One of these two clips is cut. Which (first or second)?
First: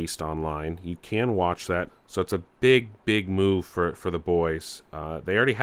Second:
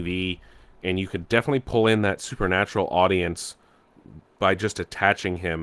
first